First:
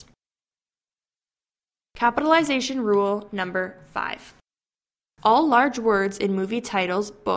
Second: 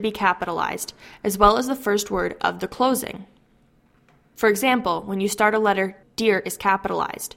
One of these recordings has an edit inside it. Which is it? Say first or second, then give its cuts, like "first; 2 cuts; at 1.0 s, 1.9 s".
second; 1 cut; at 6.0 s